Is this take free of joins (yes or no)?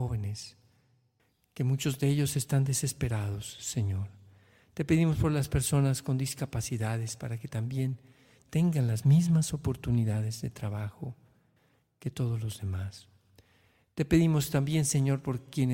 yes